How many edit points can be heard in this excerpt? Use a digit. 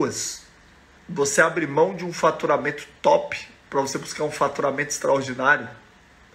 1